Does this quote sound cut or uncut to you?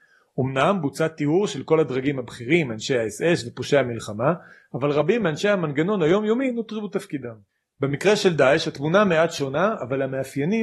uncut